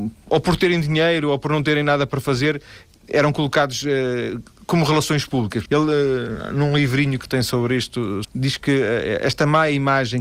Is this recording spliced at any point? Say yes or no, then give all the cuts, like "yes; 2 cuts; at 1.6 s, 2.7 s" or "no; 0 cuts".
yes; 2 cuts; at 5.7 s, 8.2 s